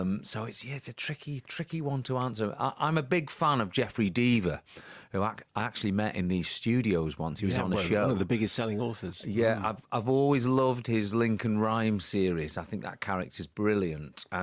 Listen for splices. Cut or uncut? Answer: uncut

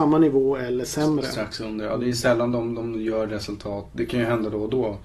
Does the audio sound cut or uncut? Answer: uncut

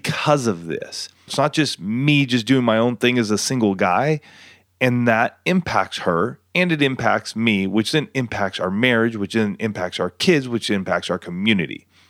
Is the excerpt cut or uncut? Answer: cut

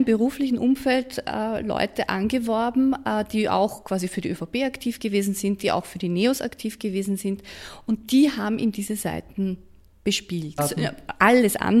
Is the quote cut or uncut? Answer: cut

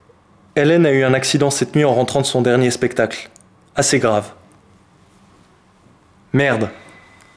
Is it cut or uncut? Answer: uncut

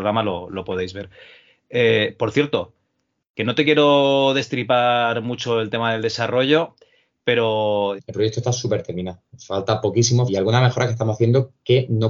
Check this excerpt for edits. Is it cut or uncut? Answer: cut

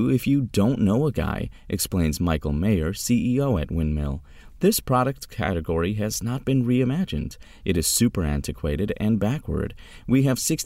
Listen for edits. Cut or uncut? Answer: uncut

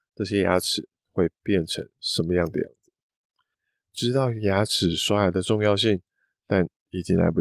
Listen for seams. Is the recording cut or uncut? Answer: cut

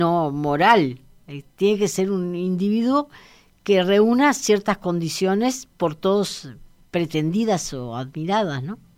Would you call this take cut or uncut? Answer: uncut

